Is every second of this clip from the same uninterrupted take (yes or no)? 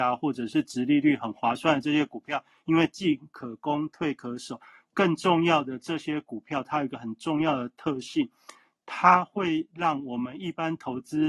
yes